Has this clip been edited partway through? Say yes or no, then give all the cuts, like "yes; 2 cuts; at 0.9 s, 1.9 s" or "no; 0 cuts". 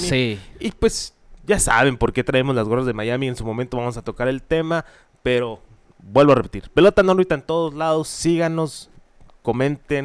no; 0 cuts